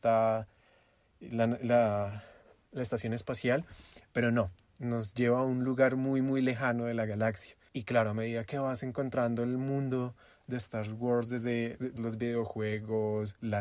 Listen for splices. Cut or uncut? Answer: cut